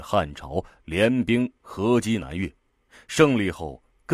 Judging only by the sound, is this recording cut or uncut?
uncut